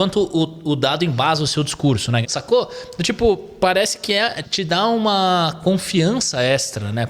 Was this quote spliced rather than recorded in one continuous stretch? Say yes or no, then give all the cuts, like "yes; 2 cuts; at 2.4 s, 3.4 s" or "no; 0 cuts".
yes; 2 cuts; at 2.2 s, 4.4 s